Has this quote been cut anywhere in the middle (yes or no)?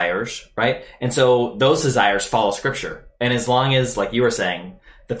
no